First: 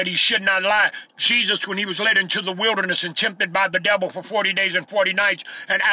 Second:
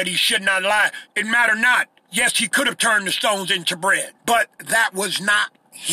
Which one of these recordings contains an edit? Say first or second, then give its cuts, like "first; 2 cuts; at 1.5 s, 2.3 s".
second; 2 cuts; at 1.1 s, 4.2 s